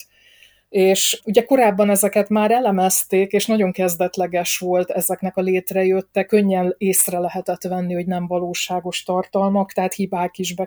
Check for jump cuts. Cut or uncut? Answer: cut